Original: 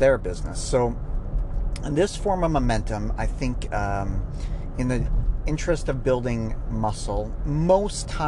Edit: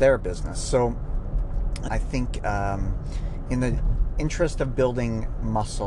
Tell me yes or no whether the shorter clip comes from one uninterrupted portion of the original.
no